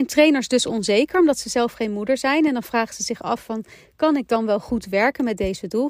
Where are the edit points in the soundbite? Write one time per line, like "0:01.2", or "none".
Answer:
none